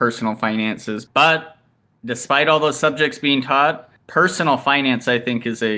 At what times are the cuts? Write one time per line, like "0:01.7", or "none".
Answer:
0:01.1
0:04.0